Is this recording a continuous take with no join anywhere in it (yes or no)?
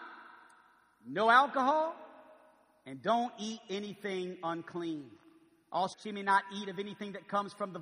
no